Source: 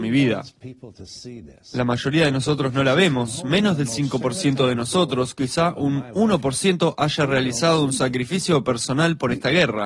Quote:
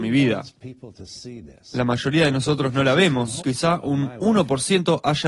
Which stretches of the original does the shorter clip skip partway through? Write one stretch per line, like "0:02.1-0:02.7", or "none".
0:03.4-0:05.4

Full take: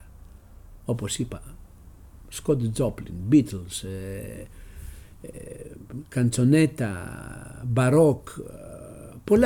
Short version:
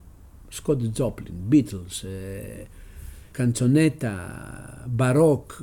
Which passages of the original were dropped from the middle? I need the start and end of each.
0:05.1-0:06.1

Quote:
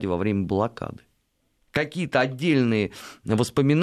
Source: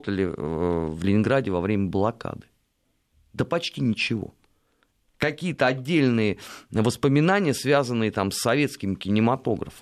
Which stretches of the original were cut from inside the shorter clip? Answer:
0:03.0-0:05.0

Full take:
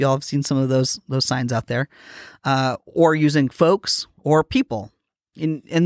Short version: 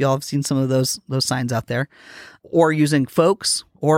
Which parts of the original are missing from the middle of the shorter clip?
0:02.4-0:02.8

